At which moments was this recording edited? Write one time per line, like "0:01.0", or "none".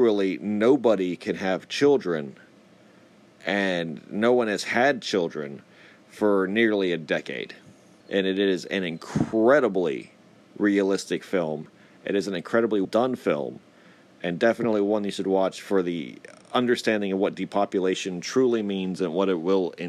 0:08.0
0:12.8